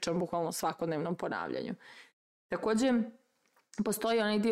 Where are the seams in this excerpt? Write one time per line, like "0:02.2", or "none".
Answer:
none